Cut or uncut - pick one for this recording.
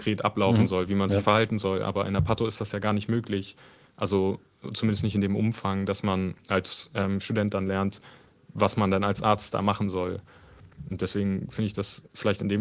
uncut